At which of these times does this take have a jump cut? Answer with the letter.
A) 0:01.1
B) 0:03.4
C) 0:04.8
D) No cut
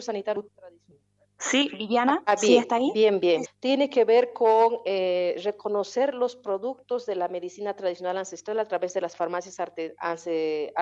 B